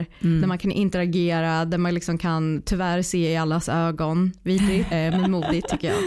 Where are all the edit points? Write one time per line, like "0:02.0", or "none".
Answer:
0:04.9